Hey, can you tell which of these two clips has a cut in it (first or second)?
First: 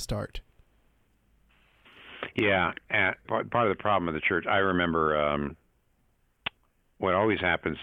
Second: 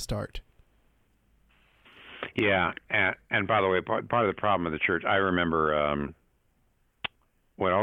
first